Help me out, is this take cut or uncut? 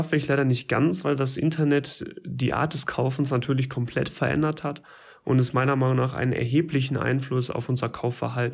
uncut